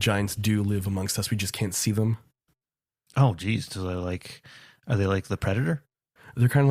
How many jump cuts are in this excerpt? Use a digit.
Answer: 0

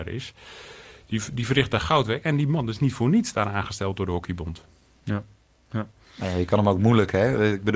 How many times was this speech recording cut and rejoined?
0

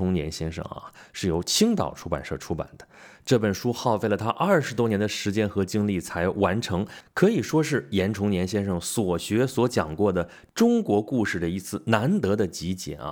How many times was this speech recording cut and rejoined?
1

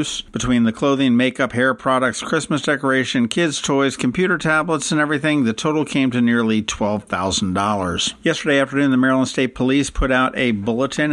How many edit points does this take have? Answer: 2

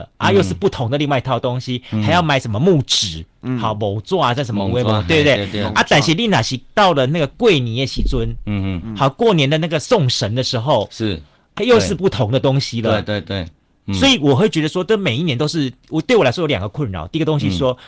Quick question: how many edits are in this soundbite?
2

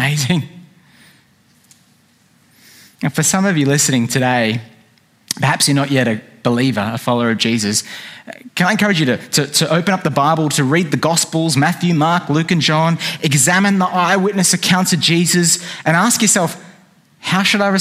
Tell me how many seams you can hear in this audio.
0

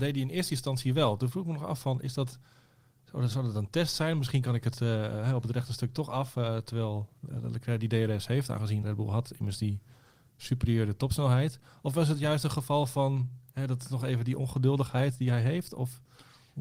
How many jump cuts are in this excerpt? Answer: 1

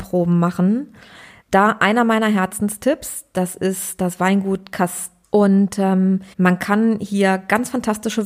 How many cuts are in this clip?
3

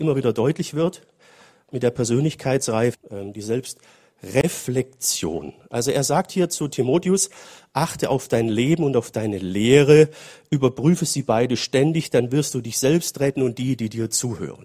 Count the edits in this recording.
1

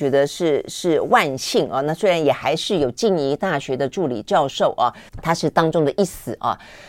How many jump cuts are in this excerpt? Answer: 1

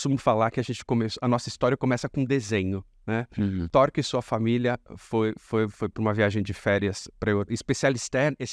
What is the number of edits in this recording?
1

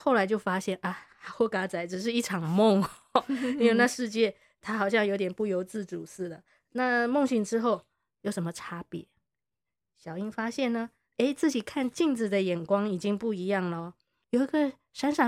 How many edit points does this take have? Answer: 1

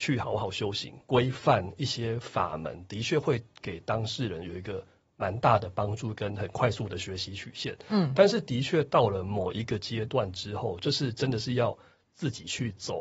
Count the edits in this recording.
1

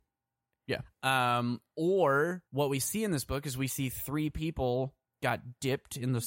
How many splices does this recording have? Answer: 2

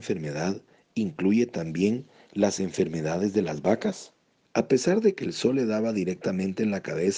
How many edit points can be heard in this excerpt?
1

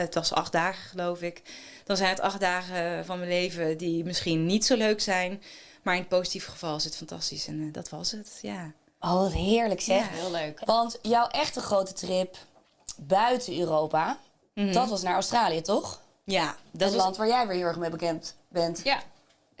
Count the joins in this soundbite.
0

